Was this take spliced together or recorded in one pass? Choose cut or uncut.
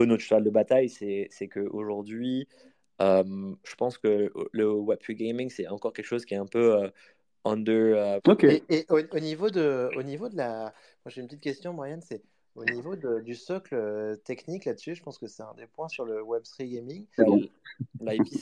cut